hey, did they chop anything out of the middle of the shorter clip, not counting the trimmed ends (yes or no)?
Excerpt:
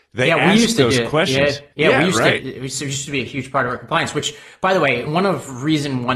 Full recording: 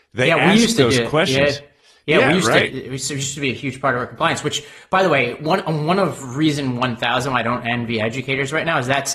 yes